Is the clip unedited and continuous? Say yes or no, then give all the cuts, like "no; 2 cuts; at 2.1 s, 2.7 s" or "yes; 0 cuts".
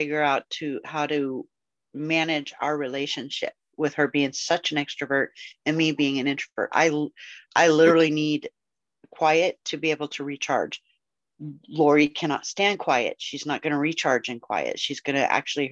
yes; 0 cuts